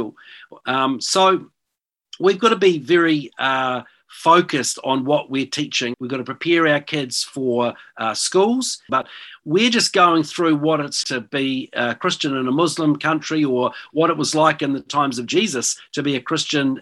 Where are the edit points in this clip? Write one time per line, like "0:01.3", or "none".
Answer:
0:05.9
0:08.9
0:11.0